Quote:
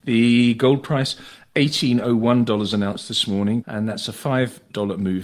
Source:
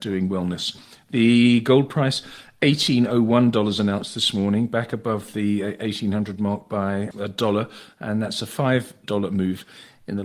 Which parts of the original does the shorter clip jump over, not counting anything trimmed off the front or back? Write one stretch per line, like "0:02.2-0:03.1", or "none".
0:04.7-0:08.0